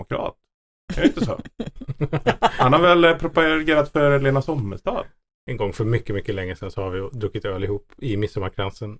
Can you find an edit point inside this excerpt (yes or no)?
no